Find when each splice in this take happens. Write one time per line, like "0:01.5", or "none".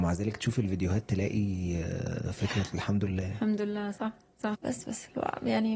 0:04.5